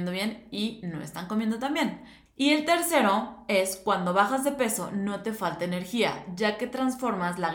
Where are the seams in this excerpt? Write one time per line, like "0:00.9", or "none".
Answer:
0:02.3